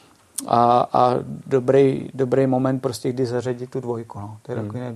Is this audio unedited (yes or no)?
yes